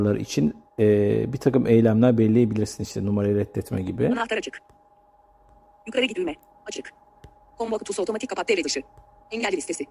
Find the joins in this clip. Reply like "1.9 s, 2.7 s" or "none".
6.5 s